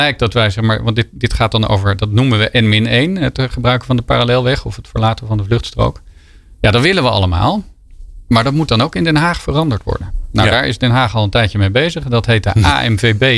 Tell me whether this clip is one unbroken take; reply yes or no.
yes